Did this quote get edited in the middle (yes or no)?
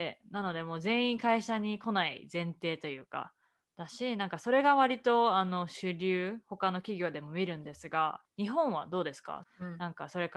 yes